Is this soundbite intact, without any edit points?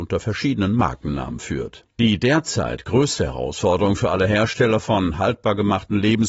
no; 1 cut; at 1.9 s

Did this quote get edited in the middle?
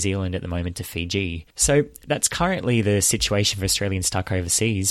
yes; 1 cut; at 1.5 s

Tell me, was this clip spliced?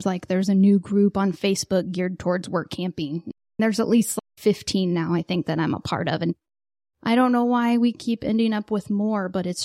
no; 0 cuts

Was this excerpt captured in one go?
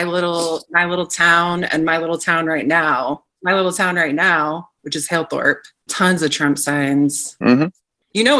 no; 1 cut; at 5.9 s

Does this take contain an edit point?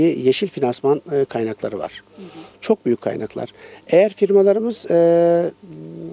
yes; 1 cut; at 2.5 s

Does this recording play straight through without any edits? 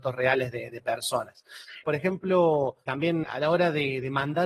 no; 2 cuts; at 1.8 s, 3.2 s

